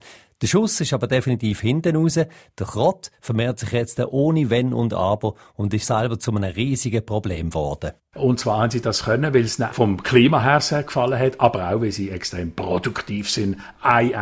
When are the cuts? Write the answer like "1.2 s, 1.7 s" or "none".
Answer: 5.8 s, 9.7 s